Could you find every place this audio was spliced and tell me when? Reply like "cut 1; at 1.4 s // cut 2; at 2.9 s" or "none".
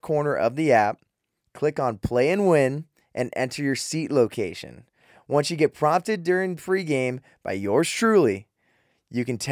none